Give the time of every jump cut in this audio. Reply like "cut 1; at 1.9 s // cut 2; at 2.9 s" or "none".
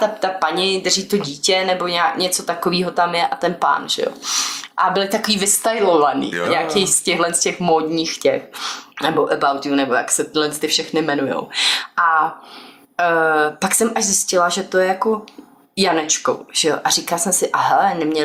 cut 1; at 6.4 s // cut 2; at 8.9 s